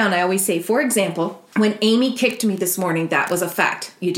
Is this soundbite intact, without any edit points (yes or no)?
yes